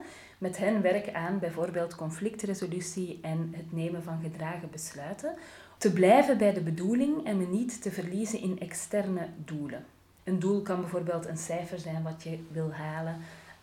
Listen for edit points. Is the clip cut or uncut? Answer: cut